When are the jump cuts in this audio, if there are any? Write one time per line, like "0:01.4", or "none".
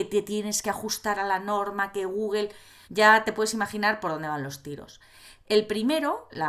0:02.8